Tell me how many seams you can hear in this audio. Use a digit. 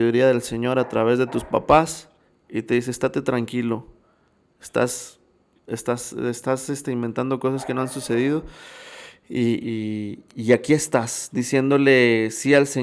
1